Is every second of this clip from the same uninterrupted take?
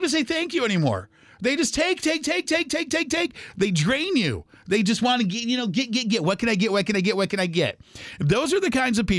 yes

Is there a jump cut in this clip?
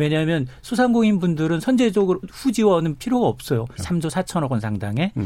yes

